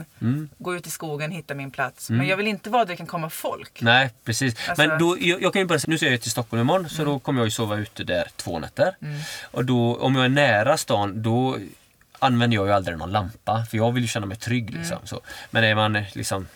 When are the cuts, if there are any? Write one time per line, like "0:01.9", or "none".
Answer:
0:05.8